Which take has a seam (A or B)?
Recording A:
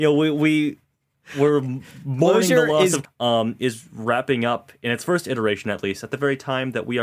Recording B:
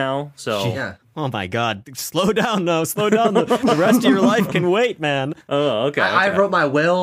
A